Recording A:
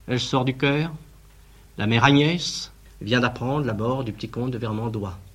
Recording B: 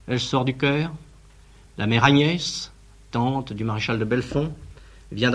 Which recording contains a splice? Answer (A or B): A